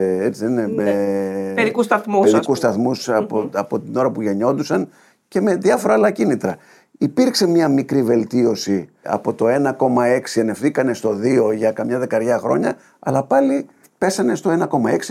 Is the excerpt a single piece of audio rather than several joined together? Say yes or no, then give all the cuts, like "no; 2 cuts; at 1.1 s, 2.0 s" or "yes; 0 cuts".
yes; 0 cuts